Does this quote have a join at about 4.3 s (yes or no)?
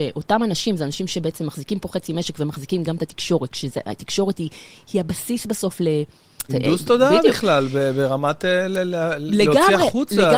no